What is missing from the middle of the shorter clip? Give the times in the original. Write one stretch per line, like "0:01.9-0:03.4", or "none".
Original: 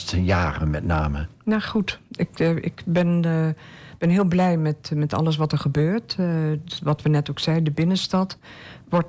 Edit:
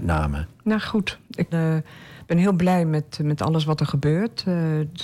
0:02.3-0:03.2